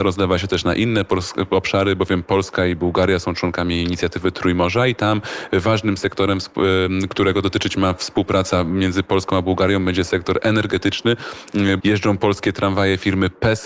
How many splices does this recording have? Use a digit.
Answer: 1